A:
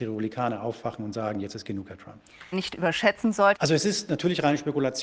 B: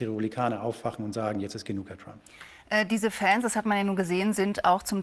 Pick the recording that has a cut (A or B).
A